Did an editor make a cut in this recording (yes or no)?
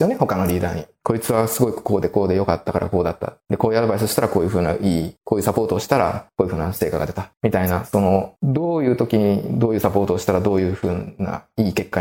no